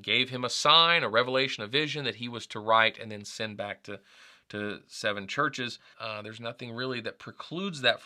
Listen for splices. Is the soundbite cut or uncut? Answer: cut